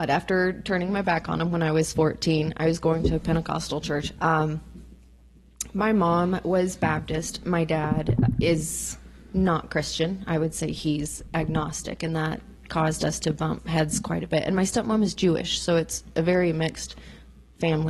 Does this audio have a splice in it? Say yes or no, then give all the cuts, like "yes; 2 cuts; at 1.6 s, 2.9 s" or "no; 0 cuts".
yes; 1 cut; at 4.2 s